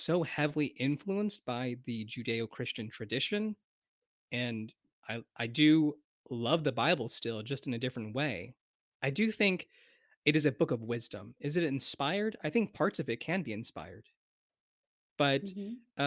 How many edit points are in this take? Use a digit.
0